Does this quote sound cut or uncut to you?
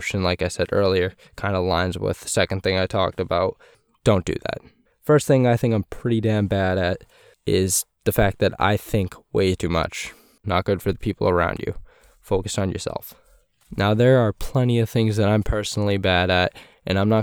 cut